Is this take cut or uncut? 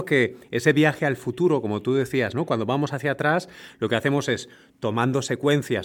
uncut